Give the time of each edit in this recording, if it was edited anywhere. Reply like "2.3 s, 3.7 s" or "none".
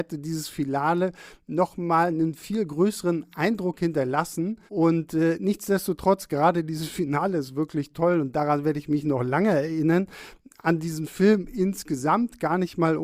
4.7 s